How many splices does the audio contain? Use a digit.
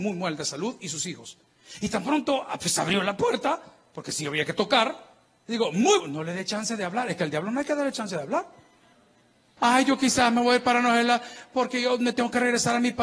2